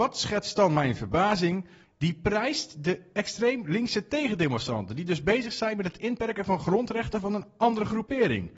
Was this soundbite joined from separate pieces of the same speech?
yes; 1 cut; at 1.8 s

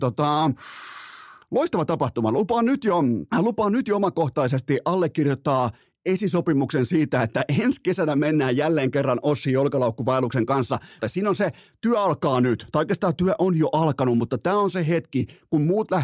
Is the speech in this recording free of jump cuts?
no; 2 cuts; at 3.3 s, 11.0 s

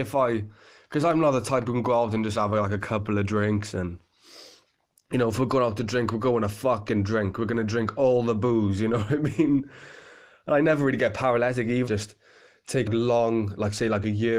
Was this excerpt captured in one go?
no; 2 cuts; at 11.9 s, 12.9 s

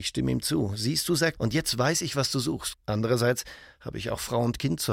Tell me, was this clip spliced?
yes; 2 cuts; at 1.4 s, 2.7 s

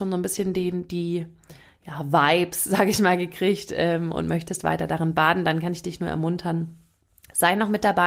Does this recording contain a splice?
no; 0 cuts

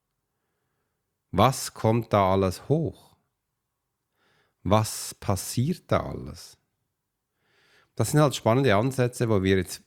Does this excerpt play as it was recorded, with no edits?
yes; 0 cuts

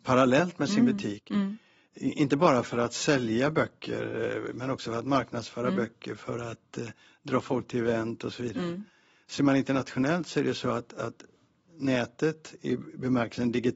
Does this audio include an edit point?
no; 0 cuts

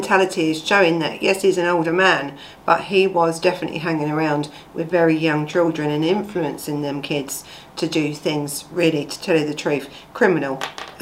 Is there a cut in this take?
no; 0 cuts

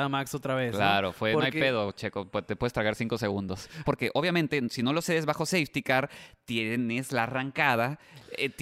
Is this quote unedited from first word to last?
no; 1 cut; at 3.8 s

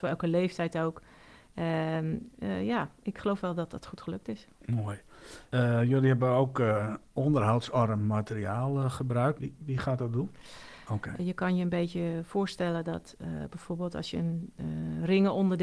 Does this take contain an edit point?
yes; 2 cuts; at 9.4 s, 10.9 s

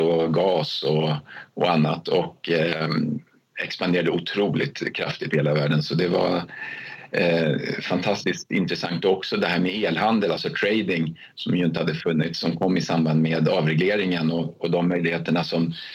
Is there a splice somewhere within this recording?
no; 0 cuts

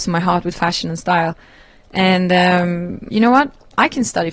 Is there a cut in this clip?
yes; 1 cut; at 3.1 s

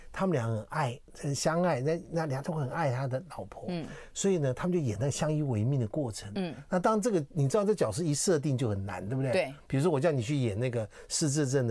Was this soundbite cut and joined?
no; 0 cuts

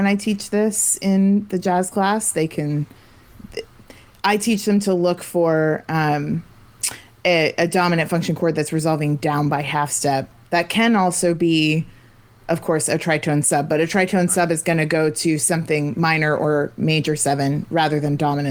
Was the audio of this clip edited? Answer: no; 0 cuts

